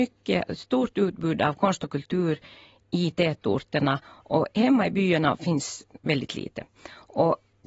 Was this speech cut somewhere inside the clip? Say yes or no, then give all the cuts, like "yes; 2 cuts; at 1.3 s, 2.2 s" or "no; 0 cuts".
no; 0 cuts